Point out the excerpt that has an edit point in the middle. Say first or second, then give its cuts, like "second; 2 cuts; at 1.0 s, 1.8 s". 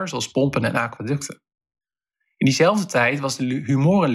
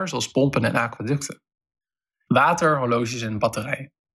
second; 1 cut; at 2.3 s